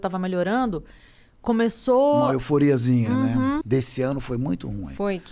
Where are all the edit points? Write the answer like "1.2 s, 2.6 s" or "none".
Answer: 3.6 s